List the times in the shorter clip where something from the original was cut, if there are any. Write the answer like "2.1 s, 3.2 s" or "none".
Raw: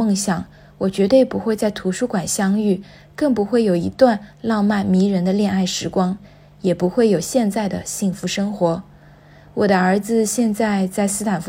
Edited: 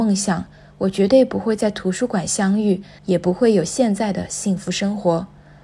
3.0 s